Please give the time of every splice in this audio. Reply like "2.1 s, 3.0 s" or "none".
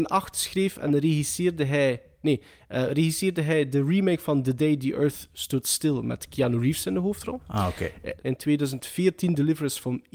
8.2 s